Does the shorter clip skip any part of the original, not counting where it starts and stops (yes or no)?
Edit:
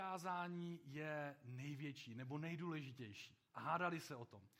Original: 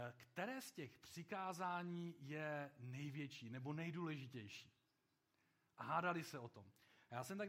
yes